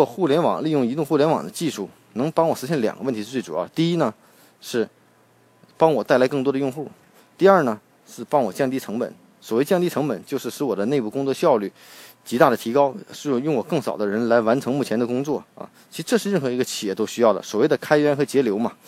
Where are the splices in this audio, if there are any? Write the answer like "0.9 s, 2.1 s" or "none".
15.5 s

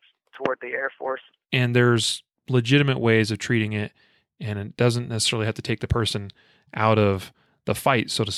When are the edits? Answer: 1.4 s

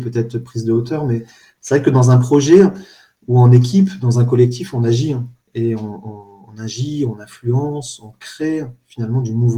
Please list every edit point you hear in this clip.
none

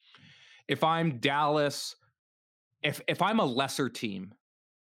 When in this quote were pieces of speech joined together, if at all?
none

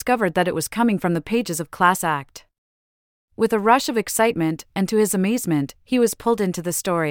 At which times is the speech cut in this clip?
4.7 s

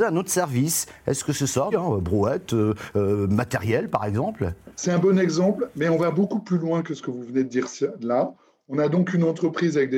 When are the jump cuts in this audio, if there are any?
1.7 s

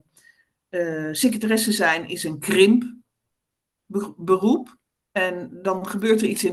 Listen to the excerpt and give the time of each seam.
5.1 s

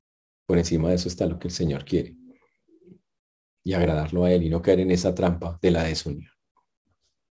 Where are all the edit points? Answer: none

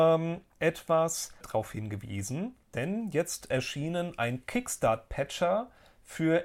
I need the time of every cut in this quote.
1.4 s, 2.6 s

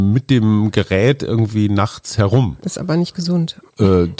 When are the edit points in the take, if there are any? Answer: none

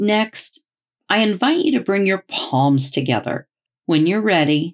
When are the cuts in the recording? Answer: 3.7 s

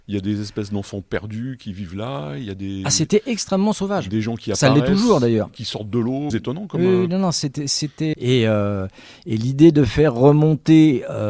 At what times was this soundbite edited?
6.3 s, 8.1 s

